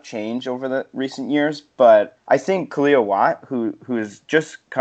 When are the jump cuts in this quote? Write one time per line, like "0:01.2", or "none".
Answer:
0:02.2